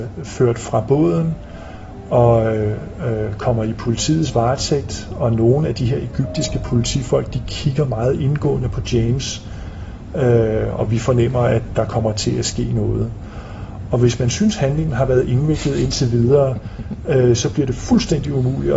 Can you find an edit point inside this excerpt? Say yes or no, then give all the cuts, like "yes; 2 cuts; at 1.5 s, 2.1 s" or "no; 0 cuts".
no; 0 cuts